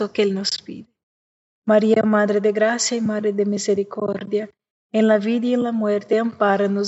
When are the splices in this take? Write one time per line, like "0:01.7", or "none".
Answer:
0:01.4